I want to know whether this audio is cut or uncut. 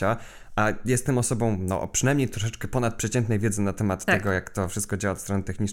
uncut